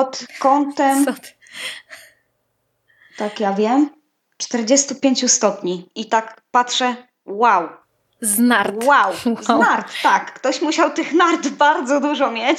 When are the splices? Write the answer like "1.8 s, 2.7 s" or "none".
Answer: none